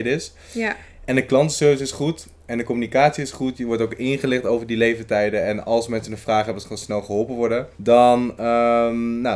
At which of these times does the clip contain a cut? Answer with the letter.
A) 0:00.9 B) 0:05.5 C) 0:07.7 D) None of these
C